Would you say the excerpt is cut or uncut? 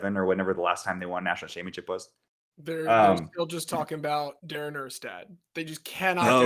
uncut